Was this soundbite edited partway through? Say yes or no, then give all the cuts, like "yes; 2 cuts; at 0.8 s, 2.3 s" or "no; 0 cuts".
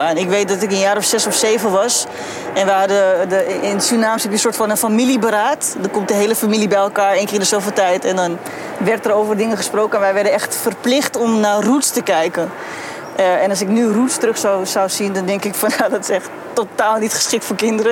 no; 0 cuts